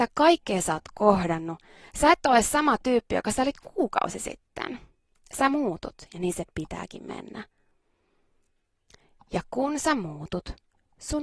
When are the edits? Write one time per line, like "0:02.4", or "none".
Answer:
none